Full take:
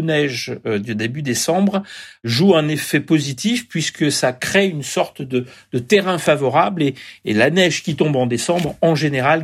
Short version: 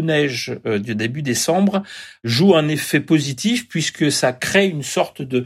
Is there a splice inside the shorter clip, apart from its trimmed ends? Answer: no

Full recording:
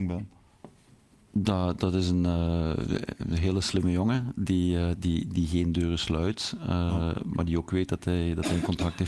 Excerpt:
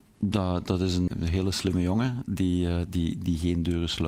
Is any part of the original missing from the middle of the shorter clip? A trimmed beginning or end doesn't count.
yes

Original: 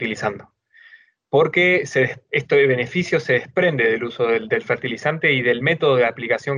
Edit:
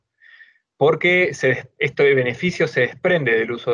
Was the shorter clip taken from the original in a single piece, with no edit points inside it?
yes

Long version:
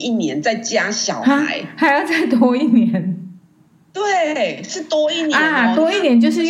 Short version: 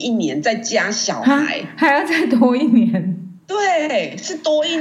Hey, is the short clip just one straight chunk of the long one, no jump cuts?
no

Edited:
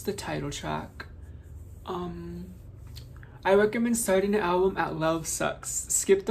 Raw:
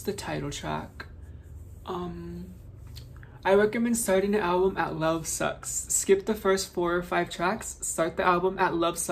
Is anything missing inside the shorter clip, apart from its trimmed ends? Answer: no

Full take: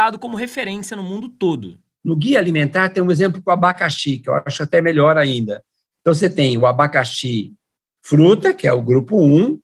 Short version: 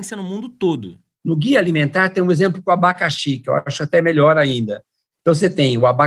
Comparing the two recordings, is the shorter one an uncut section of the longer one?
yes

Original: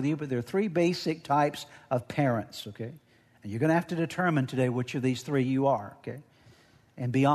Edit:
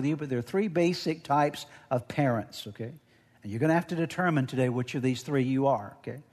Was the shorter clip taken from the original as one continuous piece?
yes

